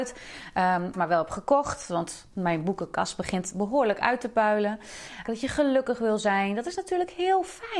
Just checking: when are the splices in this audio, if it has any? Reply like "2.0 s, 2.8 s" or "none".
0.9 s, 5.3 s